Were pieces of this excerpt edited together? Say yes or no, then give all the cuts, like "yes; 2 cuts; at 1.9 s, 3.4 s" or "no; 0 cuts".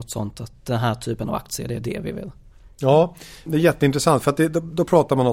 yes; 1 cut; at 3.5 s